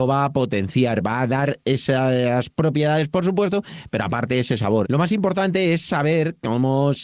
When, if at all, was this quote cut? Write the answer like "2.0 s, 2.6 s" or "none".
4.8 s